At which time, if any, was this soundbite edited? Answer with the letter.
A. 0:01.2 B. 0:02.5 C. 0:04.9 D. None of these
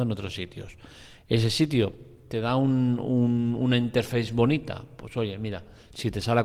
D